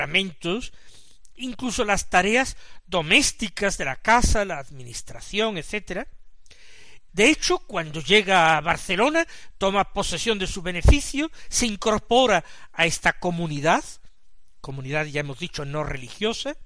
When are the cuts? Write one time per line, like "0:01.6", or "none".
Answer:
0:07.1